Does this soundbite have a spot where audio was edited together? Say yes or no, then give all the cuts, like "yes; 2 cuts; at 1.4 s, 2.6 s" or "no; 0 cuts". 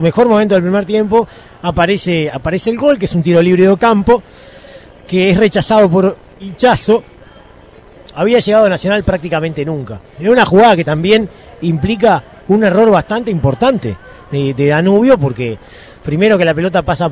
yes; 2 cuts; at 8.1 s, 10.2 s